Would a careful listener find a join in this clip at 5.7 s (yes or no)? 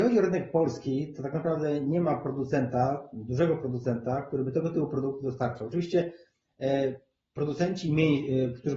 no